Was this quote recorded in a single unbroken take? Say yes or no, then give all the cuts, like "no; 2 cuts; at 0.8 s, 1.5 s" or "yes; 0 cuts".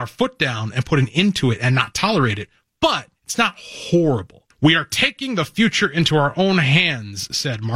no; 2 cuts; at 3.2 s, 4.5 s